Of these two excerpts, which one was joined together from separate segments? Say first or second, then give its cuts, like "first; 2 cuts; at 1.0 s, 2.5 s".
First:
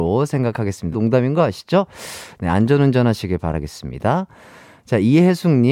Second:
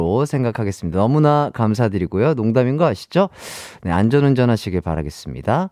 first; 1 cut; at 0.9 s